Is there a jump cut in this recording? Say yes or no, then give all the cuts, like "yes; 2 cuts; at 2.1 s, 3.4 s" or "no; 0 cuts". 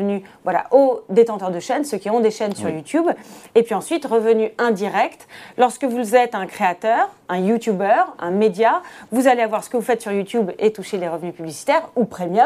no; 0 cuts